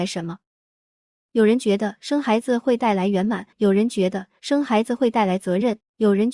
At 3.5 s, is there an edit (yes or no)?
yes